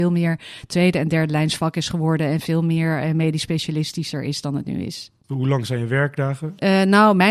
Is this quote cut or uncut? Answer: uncut